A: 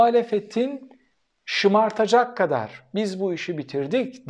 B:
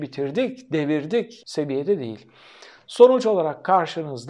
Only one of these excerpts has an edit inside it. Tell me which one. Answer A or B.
B